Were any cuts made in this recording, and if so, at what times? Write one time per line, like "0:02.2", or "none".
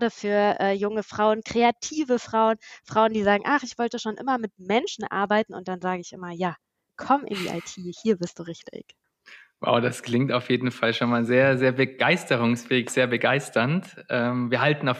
0:07.0